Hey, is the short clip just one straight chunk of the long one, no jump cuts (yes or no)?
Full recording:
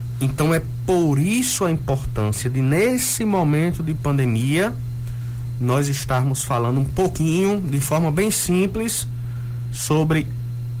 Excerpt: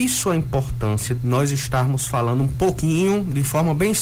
no